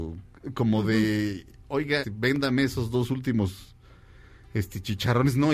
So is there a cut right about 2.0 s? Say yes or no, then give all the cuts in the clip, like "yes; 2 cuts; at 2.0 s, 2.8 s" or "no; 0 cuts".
yes; 1 cut; at 2.0 s